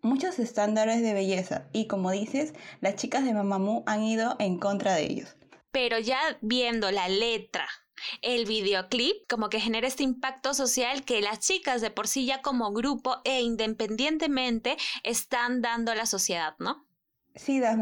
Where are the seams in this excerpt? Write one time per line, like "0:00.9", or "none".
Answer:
0:05.7
0:09.2